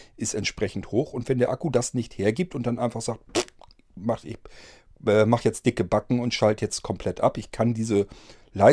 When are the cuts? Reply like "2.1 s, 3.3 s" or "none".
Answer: none